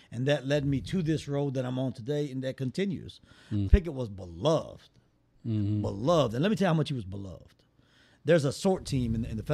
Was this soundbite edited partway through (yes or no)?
yes